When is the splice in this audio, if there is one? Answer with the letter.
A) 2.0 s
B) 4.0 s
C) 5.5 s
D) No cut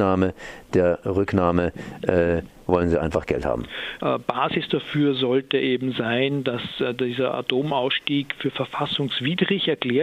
B